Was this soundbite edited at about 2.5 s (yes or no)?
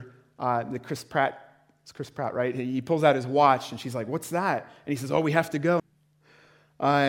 no